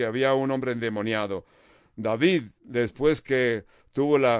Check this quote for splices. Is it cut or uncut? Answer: uncut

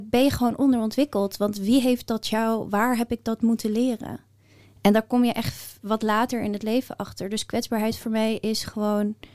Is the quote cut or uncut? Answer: uncut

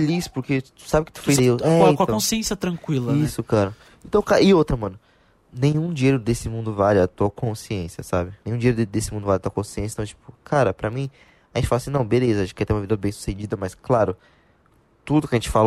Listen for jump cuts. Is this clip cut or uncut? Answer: cut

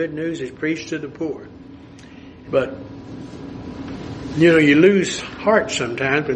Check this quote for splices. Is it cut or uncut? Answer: cut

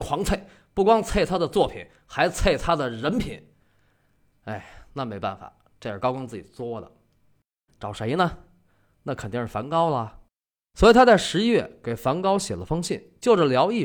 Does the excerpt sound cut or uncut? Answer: cut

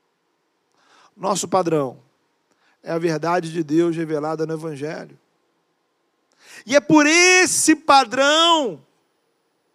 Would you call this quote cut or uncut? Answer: uncut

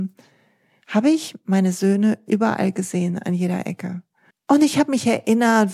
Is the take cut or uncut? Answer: cut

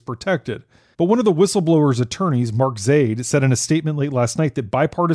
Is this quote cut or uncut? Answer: cut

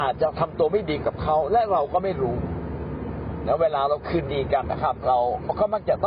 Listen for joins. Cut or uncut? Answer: cut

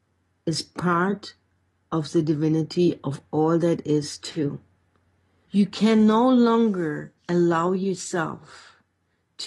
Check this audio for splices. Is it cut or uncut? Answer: cut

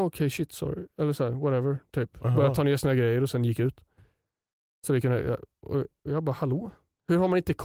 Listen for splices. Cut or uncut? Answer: uncut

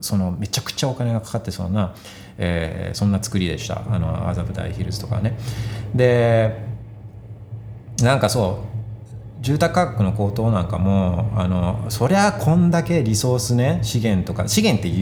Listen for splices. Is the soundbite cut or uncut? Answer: uncut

